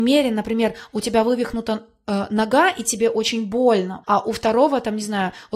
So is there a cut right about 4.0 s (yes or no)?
yes